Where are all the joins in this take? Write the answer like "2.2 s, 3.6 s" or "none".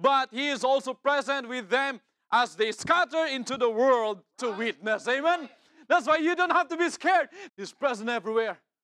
7.5 s